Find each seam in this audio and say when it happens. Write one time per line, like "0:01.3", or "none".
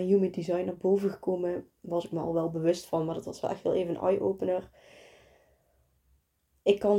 none